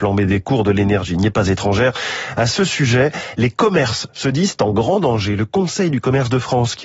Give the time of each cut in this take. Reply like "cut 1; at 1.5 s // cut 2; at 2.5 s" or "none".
none